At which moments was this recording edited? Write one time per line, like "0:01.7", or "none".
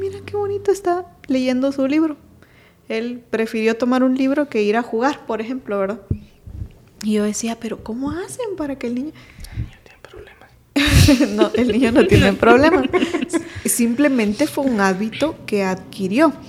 none